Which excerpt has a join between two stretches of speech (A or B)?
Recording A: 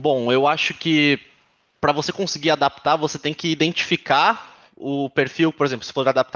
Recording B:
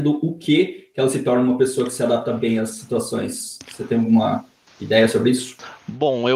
A